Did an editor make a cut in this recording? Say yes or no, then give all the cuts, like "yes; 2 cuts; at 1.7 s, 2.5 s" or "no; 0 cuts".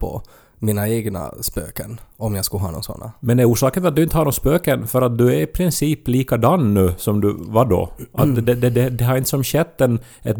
no; 0 cuts